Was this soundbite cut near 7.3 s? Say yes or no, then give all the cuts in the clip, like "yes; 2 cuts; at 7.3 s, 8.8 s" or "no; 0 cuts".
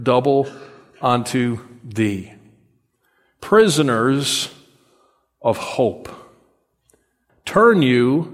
yes; 1 cut; at 7.3 s